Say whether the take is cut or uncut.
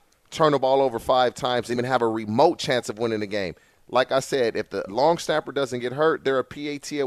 cut